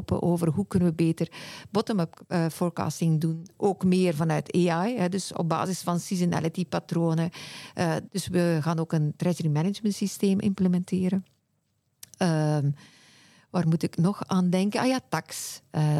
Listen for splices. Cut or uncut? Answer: cut